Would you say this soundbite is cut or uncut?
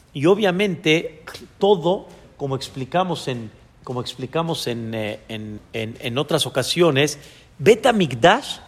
cut